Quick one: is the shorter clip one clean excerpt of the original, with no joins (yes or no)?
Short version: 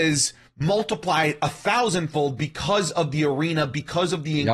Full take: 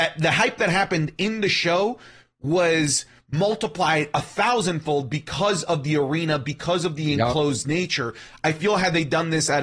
yes